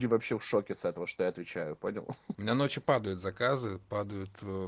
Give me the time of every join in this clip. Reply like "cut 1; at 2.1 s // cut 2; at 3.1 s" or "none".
cut 1; at 2.4 s